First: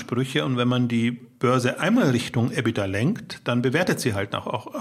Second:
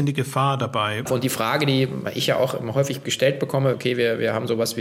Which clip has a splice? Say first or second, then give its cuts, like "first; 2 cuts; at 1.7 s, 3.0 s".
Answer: second; 2 cuts; at 1.1 s, 3.7 s